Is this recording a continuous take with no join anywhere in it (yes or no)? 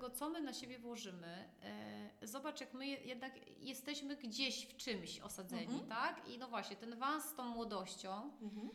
yes